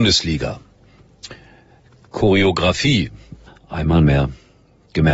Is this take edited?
yes; 1 cut; at 3.5 s

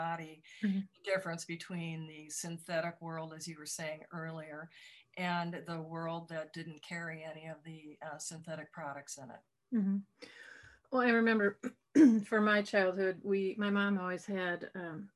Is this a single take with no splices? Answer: yes; 0 cuts

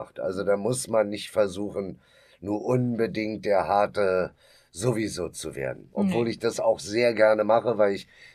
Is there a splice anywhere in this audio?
no; 0 cuts

